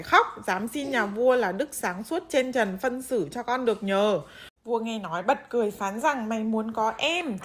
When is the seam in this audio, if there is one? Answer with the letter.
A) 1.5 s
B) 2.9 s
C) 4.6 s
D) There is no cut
C